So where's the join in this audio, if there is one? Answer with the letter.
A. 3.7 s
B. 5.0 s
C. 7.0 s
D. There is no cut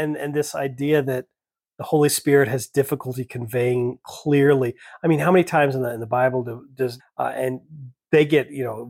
C